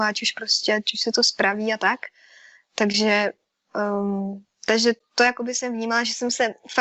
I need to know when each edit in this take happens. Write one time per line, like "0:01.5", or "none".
0:02.5